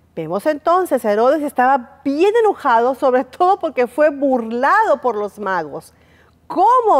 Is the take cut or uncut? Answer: uncut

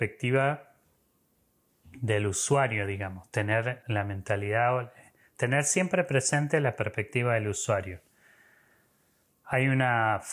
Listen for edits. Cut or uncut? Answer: cut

